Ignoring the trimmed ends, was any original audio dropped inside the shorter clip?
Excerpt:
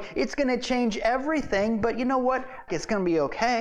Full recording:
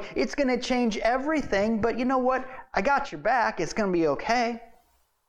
yes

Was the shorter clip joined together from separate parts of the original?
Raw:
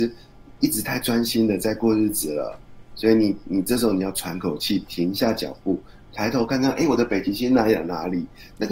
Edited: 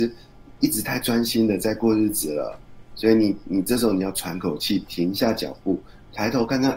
no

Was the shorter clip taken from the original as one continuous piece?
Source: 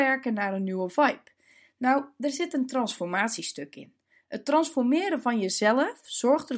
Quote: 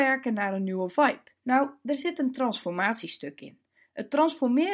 no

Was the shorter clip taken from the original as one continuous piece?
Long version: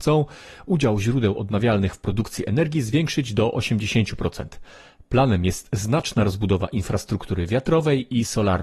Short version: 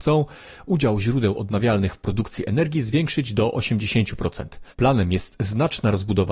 no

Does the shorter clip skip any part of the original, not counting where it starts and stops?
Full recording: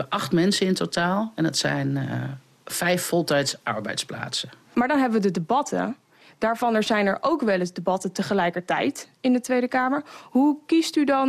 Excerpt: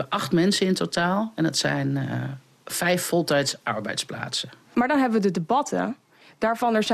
no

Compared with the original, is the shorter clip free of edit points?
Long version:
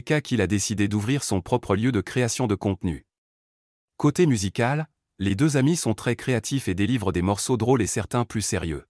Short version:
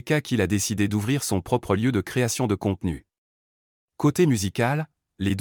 yes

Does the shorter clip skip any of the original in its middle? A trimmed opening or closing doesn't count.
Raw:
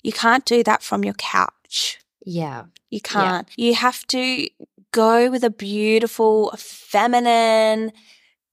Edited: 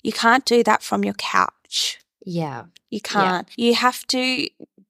no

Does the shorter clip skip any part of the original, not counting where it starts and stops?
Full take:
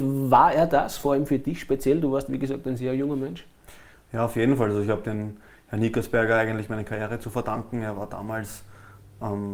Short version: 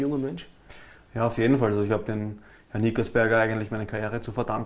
no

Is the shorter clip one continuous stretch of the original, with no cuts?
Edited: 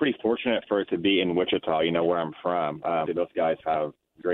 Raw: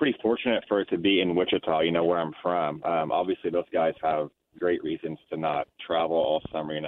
no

